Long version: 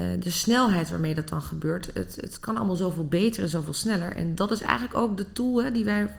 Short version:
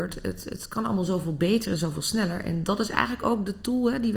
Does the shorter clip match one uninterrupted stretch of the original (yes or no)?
yes